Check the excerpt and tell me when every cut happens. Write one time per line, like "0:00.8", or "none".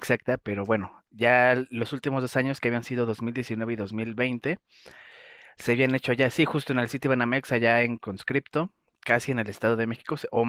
none